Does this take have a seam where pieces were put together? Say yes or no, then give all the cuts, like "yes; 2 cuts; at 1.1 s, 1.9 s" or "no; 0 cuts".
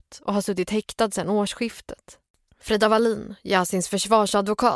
no; 0 cuts